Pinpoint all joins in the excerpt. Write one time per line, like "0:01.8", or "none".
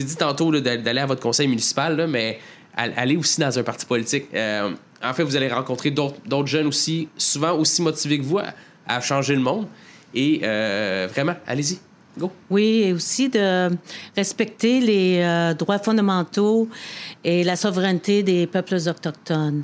0:12.4